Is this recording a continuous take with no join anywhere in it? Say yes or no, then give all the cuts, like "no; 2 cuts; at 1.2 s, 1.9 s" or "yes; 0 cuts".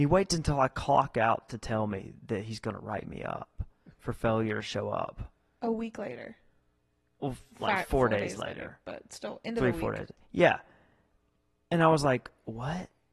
yes; 0 cuts